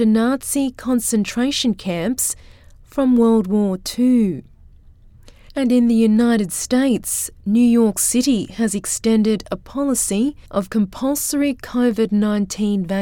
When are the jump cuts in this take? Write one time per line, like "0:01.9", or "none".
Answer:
0:05.5
0:10.5